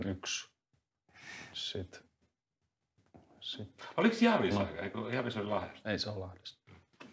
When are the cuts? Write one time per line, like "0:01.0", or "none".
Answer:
none

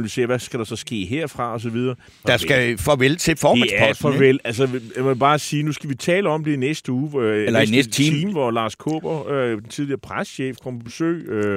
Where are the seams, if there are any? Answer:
0:02.2

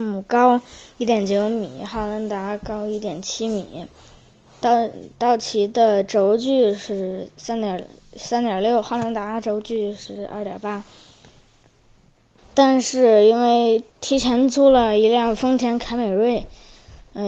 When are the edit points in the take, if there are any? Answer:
0:12.4
0:13.9

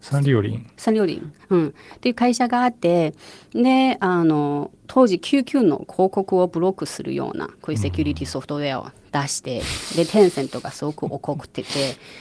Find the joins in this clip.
0:01.4
0:04.8

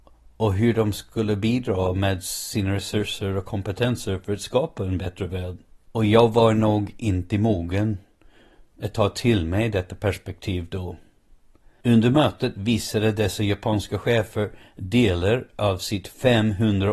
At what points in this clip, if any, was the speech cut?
0:05.9
0:11.8

